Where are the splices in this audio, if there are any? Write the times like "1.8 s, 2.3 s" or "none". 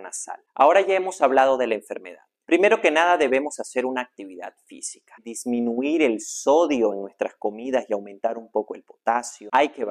2.4 s, 5.2 s